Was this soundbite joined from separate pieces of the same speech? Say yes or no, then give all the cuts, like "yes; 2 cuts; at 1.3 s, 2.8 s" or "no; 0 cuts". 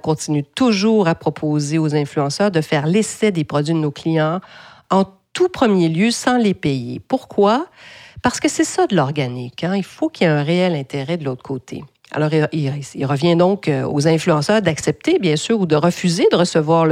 no; 0 cuts